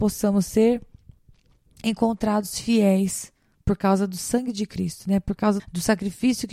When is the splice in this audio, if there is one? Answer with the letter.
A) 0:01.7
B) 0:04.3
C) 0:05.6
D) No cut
C